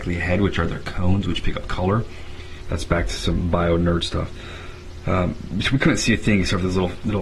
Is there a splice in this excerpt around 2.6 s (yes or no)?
yes